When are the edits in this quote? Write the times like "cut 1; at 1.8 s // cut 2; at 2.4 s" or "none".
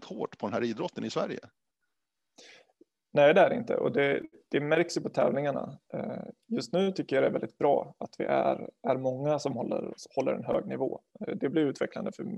none